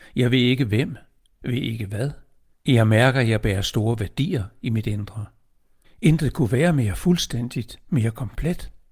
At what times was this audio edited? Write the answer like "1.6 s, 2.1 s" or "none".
2.5 s, 5.8 s